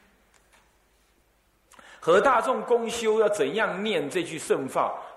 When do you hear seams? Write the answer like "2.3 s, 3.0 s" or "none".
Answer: none

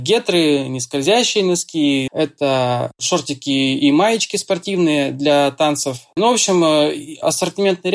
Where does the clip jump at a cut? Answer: 2.1 s, 6.2 s

